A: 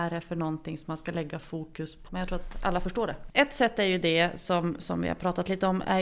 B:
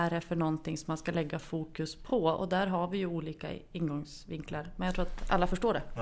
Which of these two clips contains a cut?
A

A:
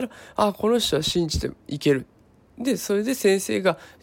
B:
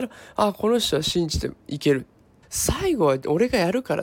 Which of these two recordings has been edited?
B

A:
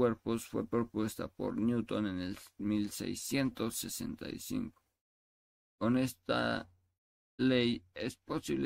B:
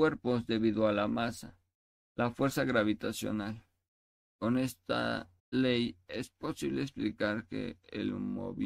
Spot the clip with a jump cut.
B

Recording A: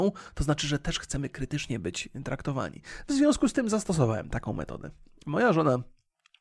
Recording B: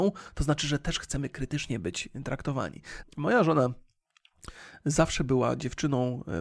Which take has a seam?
B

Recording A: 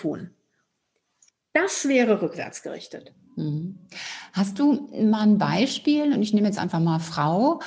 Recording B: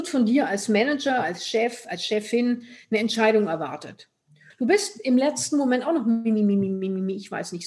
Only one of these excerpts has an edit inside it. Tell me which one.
B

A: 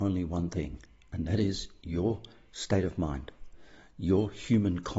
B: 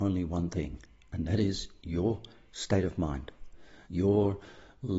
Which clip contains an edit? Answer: B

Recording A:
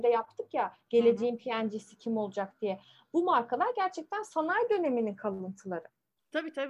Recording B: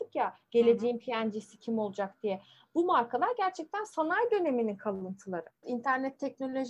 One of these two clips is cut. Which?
B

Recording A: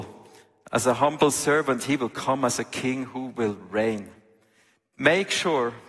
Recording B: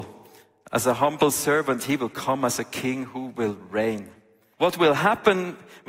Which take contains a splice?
B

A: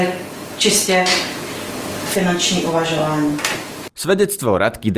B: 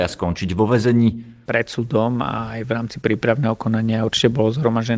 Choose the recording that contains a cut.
B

